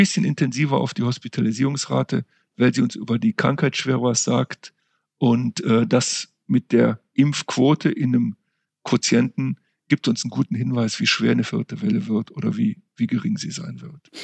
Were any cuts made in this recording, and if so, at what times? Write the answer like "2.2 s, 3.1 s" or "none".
none